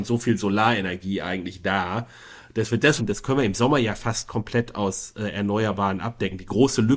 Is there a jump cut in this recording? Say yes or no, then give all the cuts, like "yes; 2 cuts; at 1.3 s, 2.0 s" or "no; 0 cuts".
yes; 1 cut; at 3.0 s